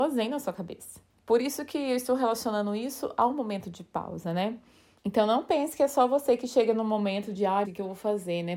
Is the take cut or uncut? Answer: cut